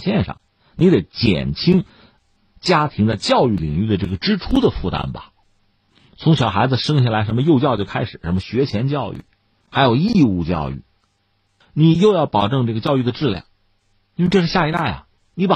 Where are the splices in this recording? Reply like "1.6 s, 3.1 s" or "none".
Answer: none